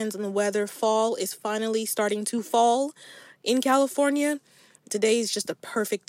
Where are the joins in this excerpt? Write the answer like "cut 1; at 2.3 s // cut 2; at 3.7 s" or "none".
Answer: none